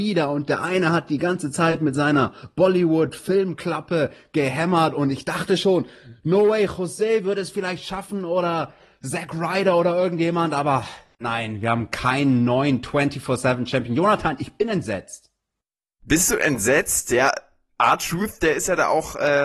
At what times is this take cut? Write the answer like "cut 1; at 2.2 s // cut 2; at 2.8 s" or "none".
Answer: none